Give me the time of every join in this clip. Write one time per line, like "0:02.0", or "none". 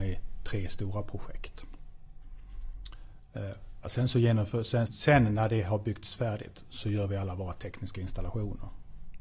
0:03.8
0:04.9